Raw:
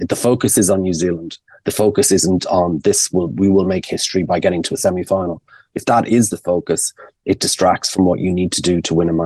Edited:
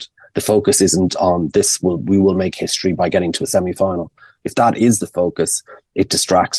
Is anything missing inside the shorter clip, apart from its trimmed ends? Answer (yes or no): no